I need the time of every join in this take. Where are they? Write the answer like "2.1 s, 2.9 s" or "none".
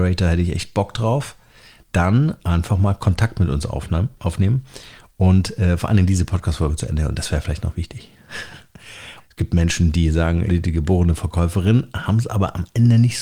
9.2 s, 10.5 s